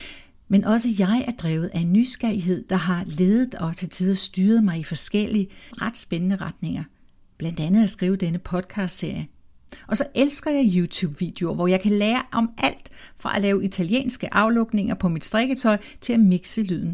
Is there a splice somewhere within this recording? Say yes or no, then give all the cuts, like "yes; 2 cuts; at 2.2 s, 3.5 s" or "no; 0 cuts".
yes; 1 cut; at 5.7 s